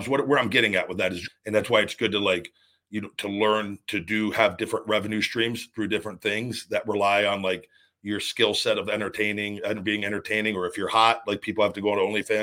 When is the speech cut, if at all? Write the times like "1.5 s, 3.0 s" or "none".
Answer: 1.3 s